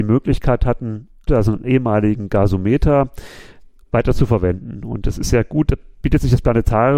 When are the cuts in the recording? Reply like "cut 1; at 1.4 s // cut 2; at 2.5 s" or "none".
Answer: cut 1; at 1.3 s